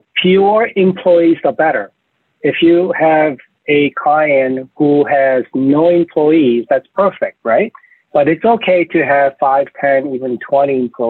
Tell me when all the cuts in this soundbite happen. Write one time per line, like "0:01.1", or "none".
0:08.1